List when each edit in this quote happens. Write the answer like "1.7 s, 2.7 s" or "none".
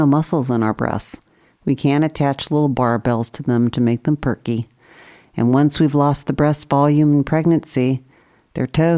none